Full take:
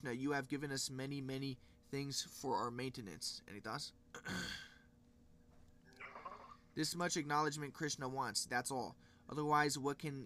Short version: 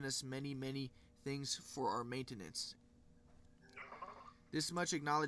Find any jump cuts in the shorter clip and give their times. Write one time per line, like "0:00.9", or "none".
0:02.8